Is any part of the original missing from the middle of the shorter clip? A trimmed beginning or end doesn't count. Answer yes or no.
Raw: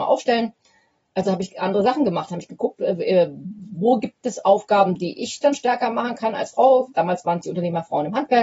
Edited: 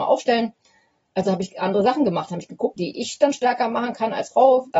yes